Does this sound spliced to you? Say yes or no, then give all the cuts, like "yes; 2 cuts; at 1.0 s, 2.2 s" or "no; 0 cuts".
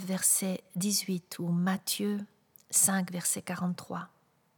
no; 0 cuts